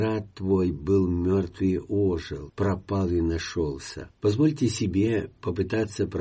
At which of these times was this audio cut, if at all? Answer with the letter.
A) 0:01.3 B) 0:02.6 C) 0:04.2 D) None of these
C